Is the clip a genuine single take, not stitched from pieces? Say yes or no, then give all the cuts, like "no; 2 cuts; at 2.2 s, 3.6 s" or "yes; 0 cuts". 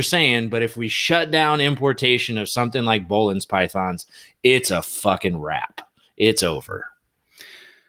yes; 0 cuts